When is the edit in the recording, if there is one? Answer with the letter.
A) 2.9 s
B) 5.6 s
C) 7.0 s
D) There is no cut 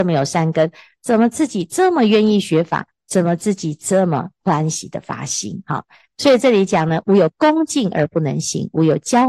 D